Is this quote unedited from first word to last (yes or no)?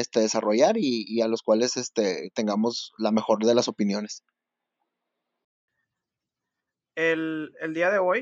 yes